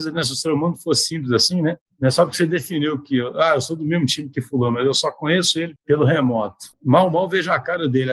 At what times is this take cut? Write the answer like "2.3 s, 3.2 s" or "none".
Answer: none